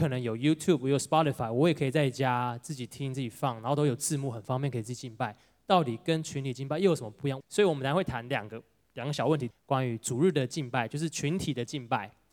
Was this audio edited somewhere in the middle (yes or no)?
yes